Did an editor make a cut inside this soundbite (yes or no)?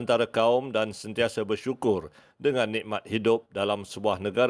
no